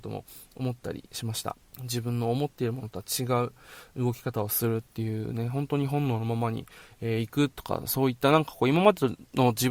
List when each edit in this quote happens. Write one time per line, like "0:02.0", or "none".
0:01.7